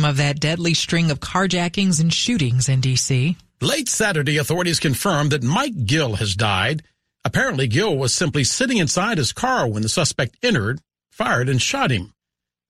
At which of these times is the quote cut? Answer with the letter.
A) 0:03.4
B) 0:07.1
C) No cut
B